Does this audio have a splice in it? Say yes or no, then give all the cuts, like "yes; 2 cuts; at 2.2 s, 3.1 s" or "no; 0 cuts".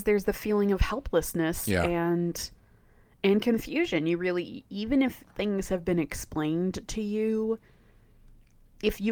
no; 0 cuts